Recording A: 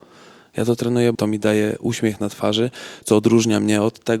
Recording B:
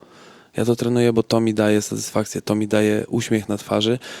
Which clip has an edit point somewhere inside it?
A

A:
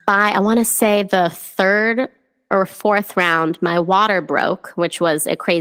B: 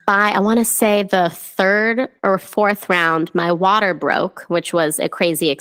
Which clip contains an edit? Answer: B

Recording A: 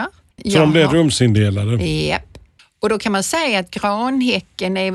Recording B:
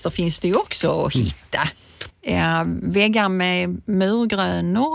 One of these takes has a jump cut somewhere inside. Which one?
B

